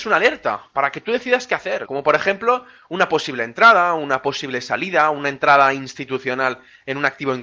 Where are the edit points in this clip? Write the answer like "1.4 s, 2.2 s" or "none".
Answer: 1.9 s